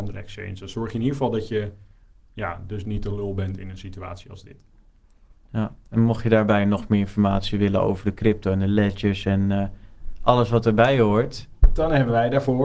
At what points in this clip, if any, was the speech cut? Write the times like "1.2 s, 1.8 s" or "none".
none